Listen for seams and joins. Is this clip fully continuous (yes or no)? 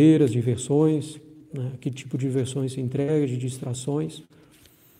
yes